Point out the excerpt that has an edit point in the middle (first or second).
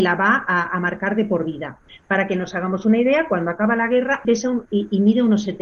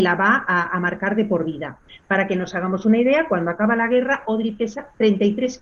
first